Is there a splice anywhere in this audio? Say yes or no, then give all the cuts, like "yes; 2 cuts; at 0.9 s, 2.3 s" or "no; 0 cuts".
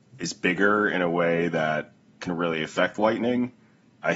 no; 0 cuts